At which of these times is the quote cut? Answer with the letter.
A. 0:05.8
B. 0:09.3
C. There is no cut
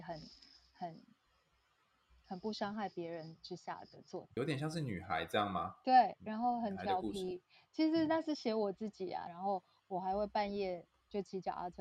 B